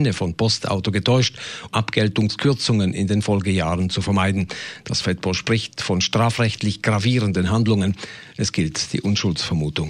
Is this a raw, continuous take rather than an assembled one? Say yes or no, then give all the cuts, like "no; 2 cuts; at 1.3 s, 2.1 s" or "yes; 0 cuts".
no; 1 cut; at 1.7 s